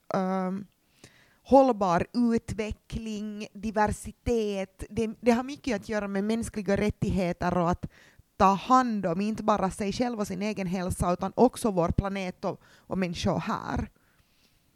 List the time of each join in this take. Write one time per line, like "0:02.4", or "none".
none